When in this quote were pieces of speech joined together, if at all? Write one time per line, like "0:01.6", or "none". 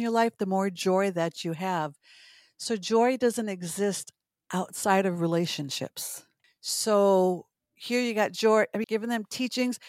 0:06.4
0:08.8